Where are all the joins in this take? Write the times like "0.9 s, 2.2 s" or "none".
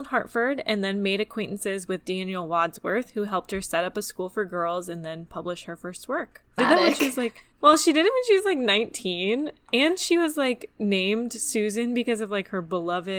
6.6 s